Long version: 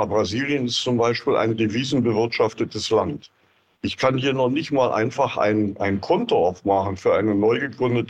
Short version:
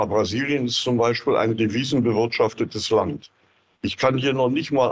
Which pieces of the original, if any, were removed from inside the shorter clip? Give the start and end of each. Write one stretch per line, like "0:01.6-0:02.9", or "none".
none